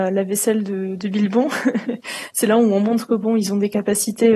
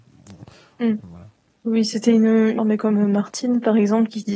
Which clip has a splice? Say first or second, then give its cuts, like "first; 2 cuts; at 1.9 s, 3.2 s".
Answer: second; 2 cuts; at 1.0 s, 2.6 s